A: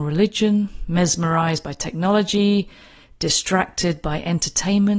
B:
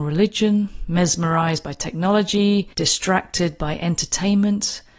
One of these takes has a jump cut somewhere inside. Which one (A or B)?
B